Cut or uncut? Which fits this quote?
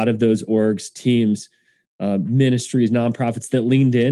uncut